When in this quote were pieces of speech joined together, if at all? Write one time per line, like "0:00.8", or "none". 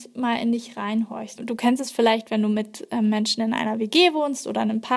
0:01.3